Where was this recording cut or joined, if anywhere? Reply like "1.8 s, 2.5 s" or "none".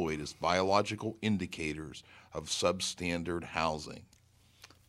none